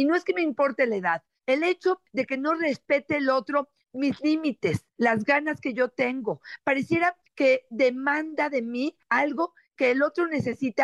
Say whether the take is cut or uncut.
uncut